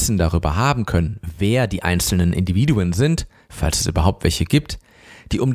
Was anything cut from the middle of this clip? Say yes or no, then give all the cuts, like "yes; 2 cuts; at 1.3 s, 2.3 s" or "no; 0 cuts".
no; 0 cuts